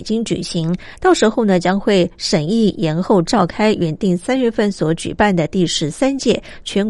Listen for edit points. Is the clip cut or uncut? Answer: uncut